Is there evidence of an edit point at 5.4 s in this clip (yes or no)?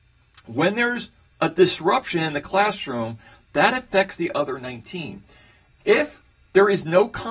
no